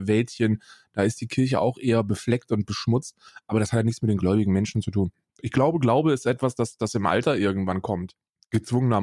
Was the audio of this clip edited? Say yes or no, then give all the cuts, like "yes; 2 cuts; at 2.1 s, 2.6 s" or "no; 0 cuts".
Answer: no; 0 cuts